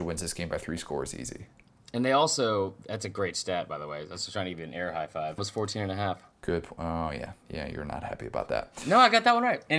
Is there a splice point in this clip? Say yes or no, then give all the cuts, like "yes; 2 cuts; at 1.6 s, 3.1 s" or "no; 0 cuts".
yes; 1 cut; at 5.4 s